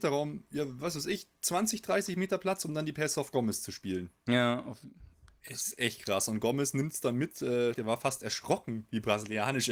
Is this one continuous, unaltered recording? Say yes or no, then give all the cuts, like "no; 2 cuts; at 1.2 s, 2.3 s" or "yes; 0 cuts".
no; 1 cut; at 7.7 s